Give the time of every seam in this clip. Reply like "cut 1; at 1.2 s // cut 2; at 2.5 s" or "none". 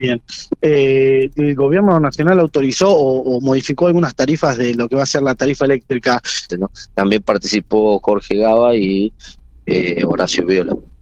cut 1; at 6.5 s